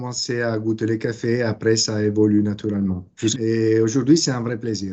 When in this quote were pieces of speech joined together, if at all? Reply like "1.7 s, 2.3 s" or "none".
3.3 s